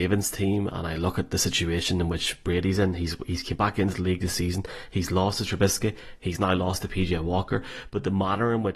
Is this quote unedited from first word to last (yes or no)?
yes